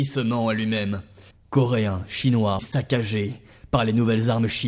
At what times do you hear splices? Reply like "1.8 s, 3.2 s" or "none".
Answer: 1.3 s, 2.6 s